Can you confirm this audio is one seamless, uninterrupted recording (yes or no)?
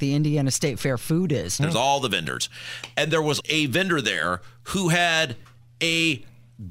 no